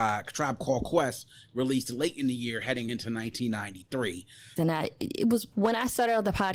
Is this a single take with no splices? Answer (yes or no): no